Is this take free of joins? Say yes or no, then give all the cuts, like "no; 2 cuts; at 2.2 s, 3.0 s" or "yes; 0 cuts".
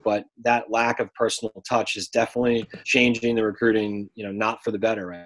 no; 1 cut; at 2.8 s